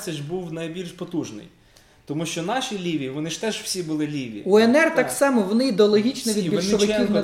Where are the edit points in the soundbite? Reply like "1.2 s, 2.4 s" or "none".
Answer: none